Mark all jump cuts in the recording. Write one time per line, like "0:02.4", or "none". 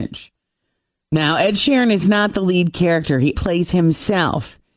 0:03.3